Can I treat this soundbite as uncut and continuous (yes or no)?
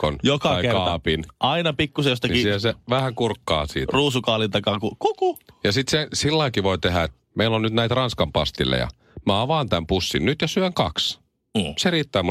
no